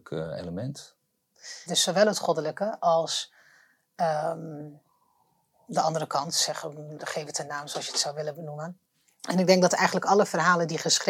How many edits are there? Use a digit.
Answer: 1